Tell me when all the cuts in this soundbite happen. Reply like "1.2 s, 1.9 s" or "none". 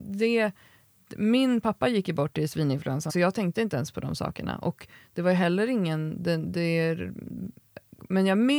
3.1 s